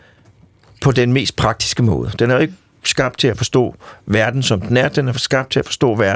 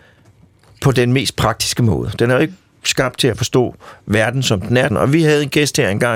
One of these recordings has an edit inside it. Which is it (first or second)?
second